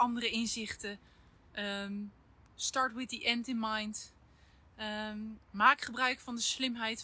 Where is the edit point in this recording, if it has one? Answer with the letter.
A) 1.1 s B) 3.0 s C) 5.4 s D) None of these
C